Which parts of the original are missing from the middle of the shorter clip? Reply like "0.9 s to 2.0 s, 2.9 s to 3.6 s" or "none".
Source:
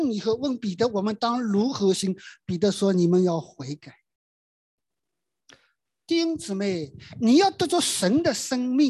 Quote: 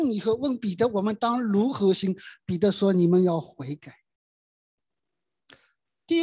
none